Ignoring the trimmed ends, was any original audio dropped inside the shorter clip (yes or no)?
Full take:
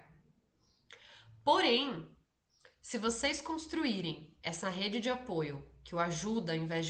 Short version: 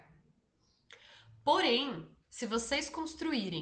yes